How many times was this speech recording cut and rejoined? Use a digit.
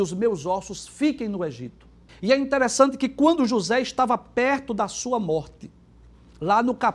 1